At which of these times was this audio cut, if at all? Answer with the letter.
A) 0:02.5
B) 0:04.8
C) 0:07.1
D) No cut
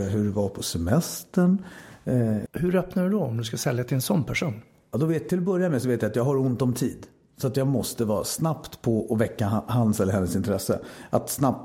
A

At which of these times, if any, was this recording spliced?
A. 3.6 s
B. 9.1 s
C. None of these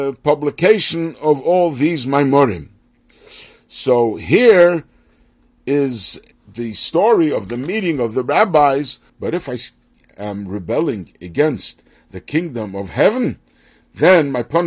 B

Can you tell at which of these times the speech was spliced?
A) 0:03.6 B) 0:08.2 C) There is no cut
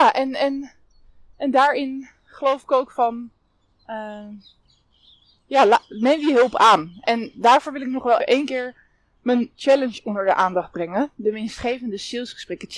B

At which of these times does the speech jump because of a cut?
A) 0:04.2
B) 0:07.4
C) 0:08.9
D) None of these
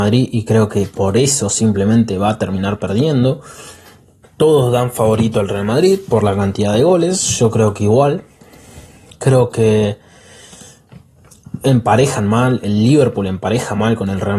A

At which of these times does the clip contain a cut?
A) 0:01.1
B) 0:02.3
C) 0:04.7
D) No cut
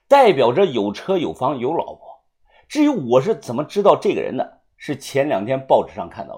D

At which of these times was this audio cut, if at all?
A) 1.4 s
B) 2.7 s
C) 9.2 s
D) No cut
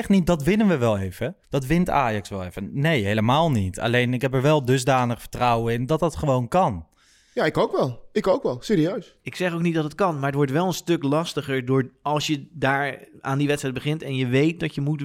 A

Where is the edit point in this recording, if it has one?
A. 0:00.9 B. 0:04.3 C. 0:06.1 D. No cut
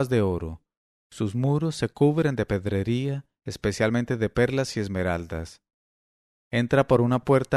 D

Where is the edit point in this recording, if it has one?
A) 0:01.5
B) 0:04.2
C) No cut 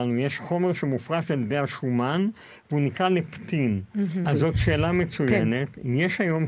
B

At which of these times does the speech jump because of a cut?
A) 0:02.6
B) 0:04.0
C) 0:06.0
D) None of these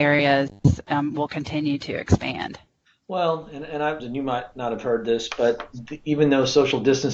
B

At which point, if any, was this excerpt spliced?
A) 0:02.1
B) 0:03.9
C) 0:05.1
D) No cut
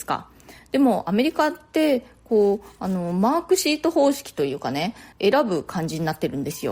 C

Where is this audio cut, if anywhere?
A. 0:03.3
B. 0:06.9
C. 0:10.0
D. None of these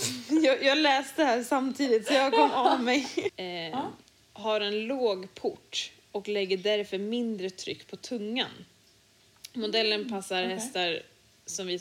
A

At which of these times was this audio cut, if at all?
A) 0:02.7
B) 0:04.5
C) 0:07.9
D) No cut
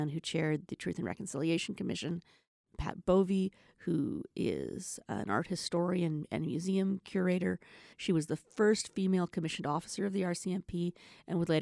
C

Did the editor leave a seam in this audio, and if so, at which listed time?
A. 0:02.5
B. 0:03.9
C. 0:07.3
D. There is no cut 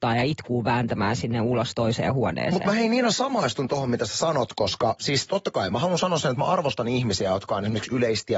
D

